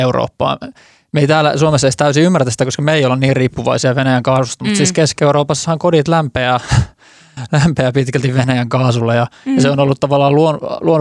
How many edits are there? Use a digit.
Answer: 0